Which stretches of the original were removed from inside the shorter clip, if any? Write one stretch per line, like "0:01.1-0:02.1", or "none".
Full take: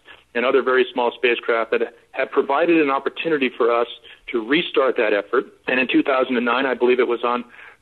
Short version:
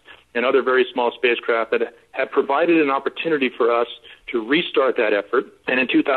none